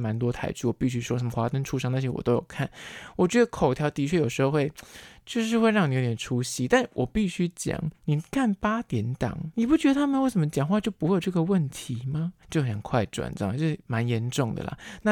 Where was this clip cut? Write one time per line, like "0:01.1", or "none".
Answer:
0:08.0
0:09.5
0:12.4